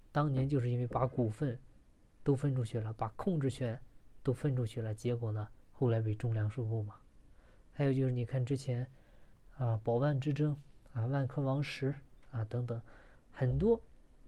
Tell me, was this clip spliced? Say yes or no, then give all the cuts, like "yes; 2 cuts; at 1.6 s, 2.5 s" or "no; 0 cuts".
yes; 1 cut; at 5.6 s